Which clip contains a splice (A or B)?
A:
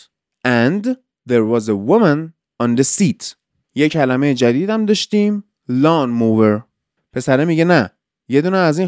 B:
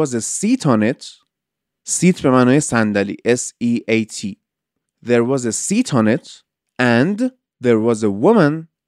A